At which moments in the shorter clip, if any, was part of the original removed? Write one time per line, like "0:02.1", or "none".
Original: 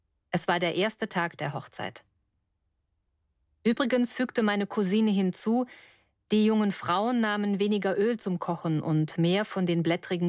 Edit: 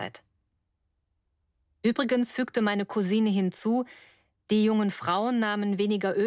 none